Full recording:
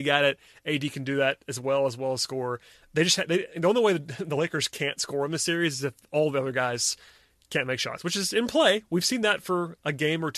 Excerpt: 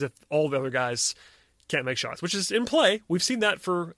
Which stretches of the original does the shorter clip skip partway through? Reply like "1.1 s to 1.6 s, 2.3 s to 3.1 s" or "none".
none